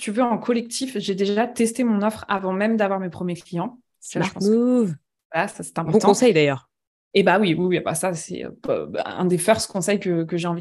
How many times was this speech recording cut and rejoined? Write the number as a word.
zero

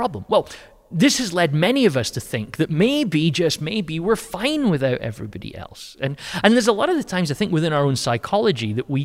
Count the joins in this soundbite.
zero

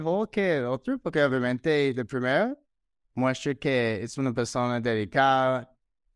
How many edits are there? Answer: zero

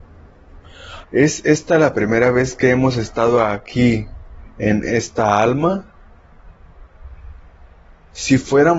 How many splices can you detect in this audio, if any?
one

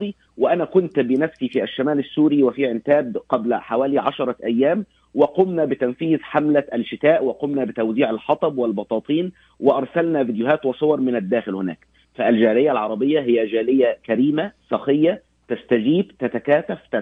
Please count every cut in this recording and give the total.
zero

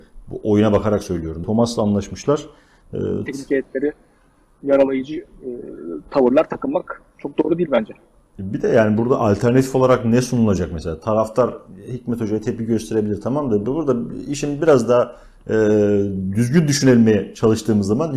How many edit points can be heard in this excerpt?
two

